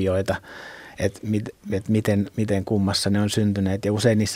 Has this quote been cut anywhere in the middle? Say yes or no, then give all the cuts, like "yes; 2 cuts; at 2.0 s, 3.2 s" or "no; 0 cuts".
no; 0 cuts